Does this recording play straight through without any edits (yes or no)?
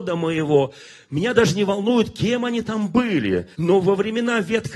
no